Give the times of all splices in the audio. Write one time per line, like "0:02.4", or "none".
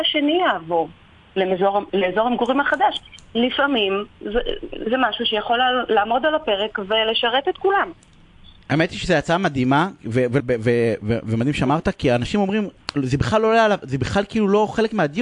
0:10.4